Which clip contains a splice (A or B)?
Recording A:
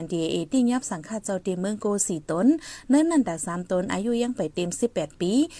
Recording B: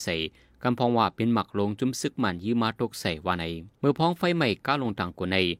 B